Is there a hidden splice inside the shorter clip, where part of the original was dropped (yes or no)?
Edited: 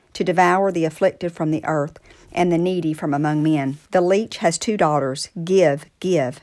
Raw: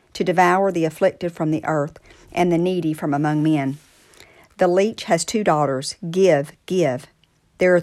yes